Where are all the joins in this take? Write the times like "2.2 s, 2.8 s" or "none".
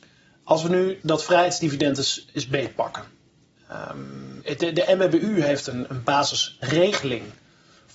1.0 s, 4.4 s, 5.9 s

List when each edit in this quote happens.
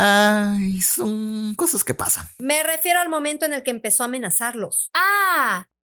none

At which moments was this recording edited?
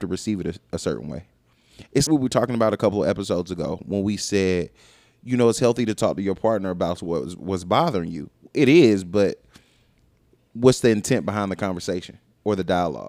2.1 s

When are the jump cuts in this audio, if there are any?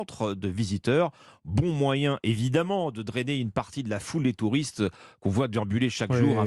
none

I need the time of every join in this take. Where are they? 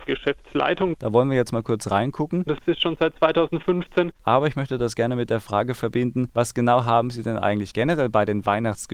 0.9 s, 2.5 s, 4.2 s

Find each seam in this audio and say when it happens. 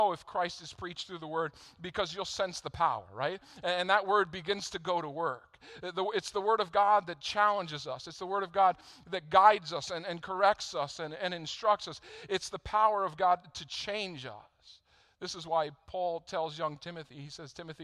none

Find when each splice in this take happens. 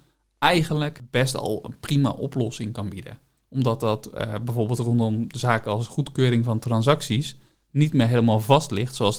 3.4 s

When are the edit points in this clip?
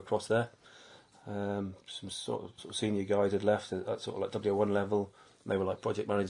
2.6 s

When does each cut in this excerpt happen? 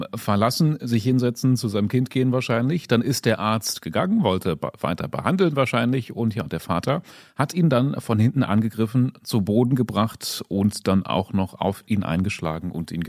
none

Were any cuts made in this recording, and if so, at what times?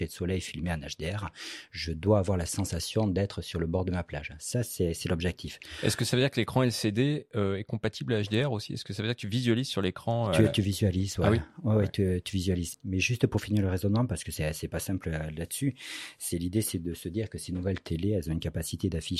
12.7 s

